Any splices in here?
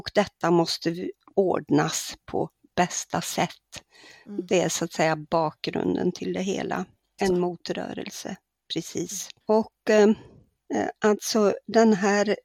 yes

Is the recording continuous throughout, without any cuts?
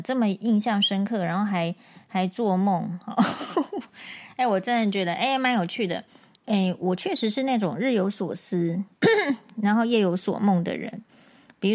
no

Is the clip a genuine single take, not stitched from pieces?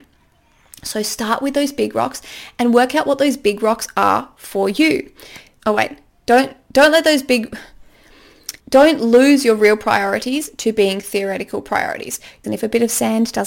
no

